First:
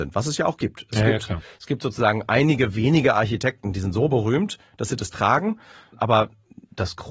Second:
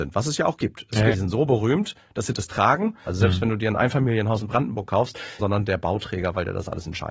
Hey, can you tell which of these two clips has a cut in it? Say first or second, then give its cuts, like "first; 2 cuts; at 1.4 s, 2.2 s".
second; 3 cuts; at 1.1 s, 3.1 s, 5.4 s